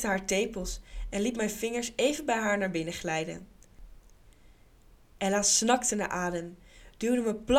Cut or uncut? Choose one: uncut